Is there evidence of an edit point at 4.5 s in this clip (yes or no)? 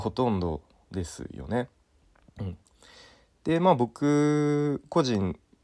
no